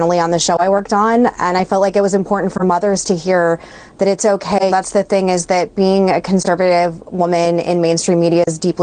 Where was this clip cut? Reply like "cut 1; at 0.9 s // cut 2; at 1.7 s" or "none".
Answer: cut 1; at 4.7 s